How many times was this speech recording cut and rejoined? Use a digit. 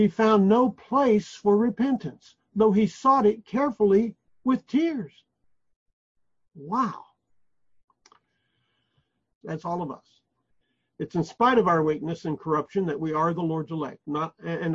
1